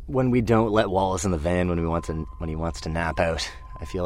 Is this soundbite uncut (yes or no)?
yes